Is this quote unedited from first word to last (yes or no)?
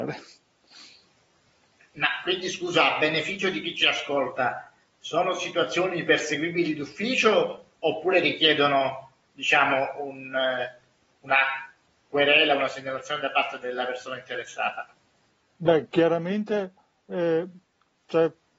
yes